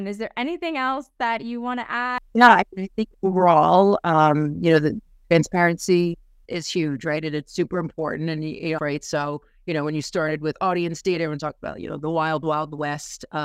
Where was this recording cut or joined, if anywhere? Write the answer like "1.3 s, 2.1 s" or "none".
6.5 s, 8.8 s